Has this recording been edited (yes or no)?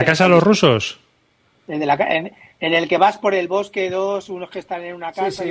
no